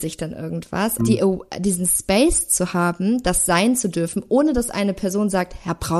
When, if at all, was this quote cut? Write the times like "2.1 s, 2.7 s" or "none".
1.0 s